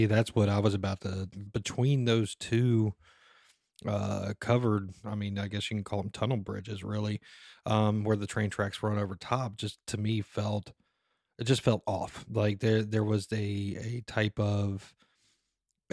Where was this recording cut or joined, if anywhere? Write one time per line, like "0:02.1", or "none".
0:01.5